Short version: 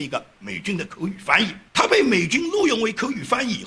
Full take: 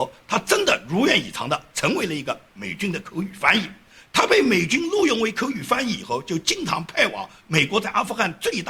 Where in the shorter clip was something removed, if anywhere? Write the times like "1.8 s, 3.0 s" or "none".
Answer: 1.7 s